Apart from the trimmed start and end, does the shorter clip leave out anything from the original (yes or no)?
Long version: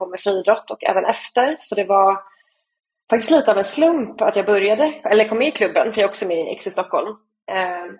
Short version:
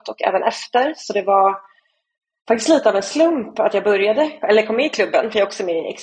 no